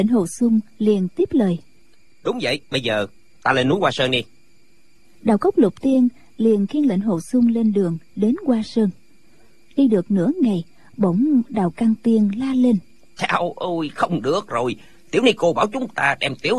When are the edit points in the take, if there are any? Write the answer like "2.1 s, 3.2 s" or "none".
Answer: 2.6 s